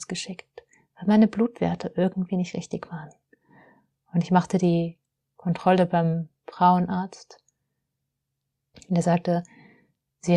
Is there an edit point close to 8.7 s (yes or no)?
yes